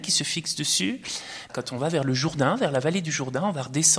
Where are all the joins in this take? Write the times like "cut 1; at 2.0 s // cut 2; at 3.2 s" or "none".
cut 1; at 1.5 s